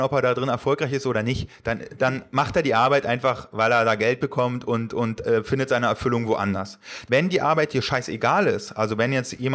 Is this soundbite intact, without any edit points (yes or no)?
no